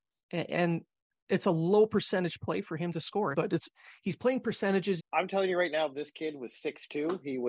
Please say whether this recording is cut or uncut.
cut